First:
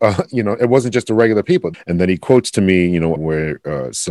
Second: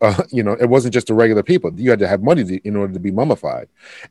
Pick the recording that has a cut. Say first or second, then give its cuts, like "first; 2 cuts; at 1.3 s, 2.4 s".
first; 2 cuts; at 1.7 s, 3.2 s